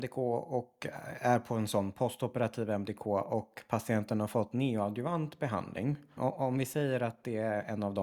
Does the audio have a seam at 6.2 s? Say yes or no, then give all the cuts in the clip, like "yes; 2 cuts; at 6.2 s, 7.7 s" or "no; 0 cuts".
yes; 1 cut; at 6.2 s